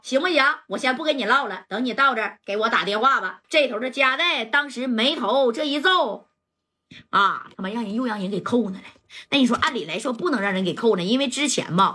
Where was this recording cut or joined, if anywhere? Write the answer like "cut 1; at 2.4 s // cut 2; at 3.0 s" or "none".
cut 1; at 3.4 s

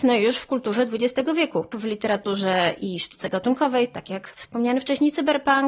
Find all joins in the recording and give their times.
cut 1; at 1.7 s

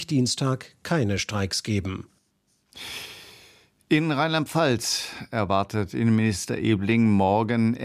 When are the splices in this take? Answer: none

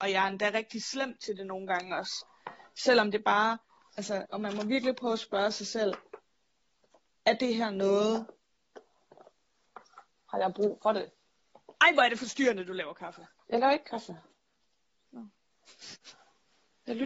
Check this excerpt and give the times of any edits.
cut 1; at 4.3 s

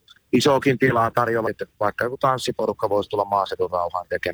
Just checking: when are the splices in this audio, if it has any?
cut 1; at 1.4 s

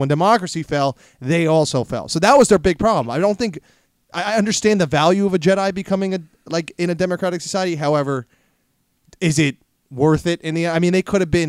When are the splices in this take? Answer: none

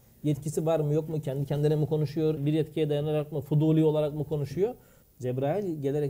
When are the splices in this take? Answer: cut 1; at 2.4 s // cut 2; at 5.0 s

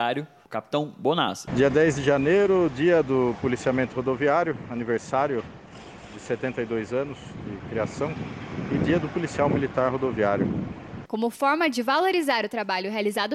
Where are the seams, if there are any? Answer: cut 1; at 1.5 s // cut 2; at 11.1 s

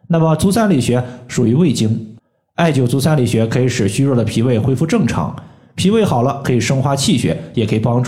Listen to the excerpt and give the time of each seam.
none

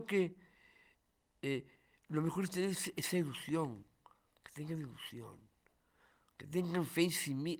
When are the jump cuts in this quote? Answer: none

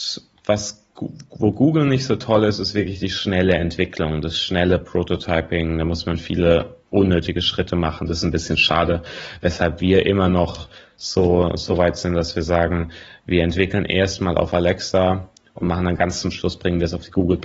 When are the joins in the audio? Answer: cut 1; at 6.8 s

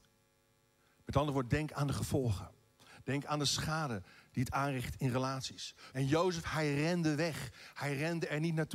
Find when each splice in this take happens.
cut 1; at 5.9 s

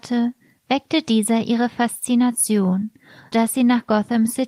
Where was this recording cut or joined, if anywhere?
cut 1; at 3.3 s

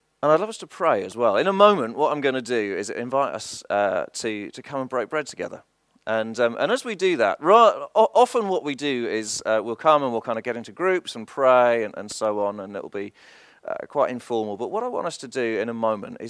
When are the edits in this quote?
none

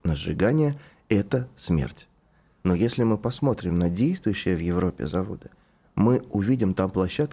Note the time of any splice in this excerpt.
cut 1; at 2.6 s

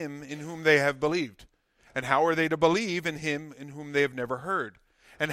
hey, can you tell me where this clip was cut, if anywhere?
none

